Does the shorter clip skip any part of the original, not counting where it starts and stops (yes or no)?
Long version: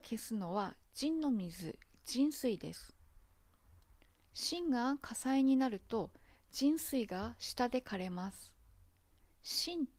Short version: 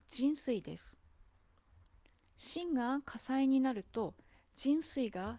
no